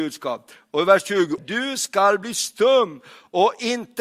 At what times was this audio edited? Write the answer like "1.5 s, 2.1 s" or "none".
1.4 s